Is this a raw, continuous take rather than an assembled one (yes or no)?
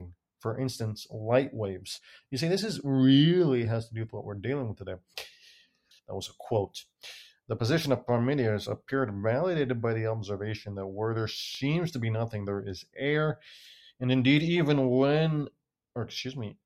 no